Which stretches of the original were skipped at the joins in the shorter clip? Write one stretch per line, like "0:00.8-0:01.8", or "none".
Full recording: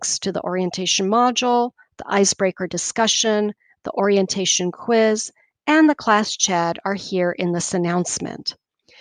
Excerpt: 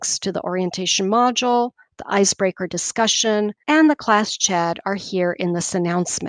0:03.6-0:05.6

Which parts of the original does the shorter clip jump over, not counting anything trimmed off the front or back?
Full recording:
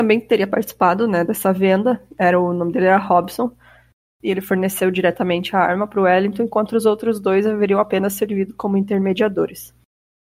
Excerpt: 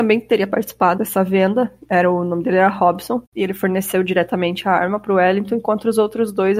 0:01.0-0:01.3
0:03.5-0:04.1

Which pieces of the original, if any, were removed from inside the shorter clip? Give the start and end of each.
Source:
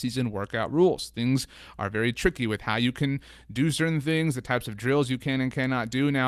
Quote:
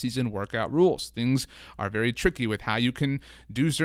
none

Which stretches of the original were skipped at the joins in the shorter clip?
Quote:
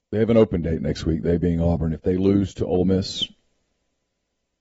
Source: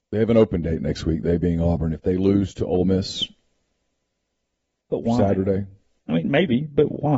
none

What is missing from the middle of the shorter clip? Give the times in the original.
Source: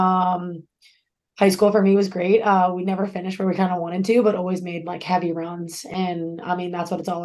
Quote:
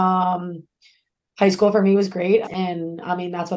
0:02.4-0:05.8

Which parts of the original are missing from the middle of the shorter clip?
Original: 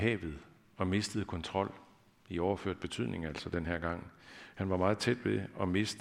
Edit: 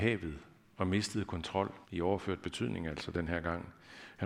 0:01.8-0:02.2

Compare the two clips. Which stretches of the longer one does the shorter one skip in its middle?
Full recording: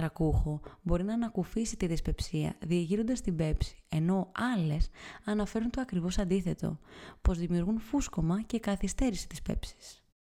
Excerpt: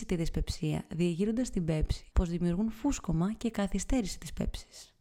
0:03.8-0:07.2

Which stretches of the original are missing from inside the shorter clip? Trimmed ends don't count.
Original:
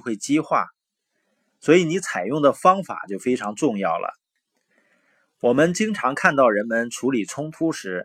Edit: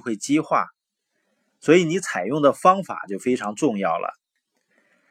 none

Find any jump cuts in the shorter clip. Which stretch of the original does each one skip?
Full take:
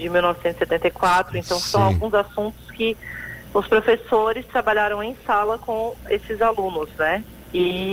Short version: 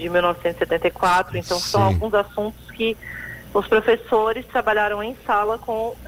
none

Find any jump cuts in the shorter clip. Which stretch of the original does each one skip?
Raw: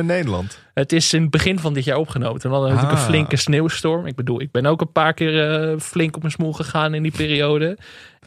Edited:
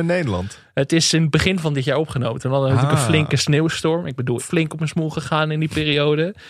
0:04.4-0:05.8

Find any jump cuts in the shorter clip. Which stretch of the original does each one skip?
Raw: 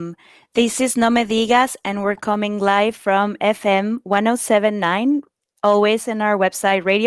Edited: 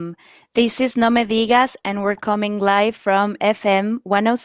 none

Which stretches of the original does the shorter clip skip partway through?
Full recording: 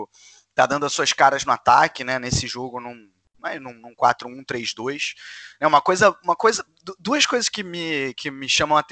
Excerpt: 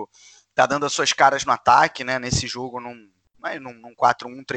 none

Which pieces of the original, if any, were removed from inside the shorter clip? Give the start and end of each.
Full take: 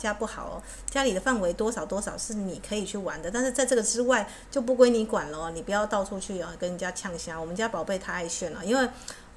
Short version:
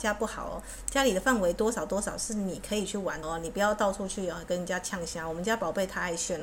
0:03.2-0:05.3

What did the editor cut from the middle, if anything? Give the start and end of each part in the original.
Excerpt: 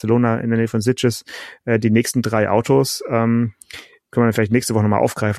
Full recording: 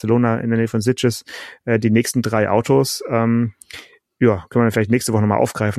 0:04.1-0:04.5

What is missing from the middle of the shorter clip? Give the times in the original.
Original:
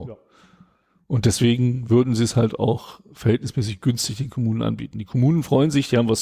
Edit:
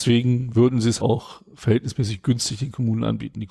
0:02.3-0:02.6

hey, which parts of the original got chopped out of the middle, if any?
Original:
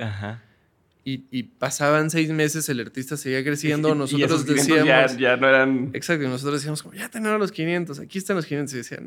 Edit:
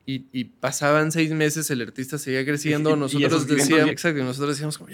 0:04.9-0:05.9

